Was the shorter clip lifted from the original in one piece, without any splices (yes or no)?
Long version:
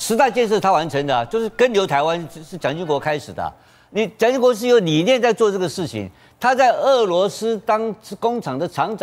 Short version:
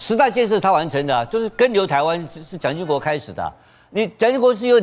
yes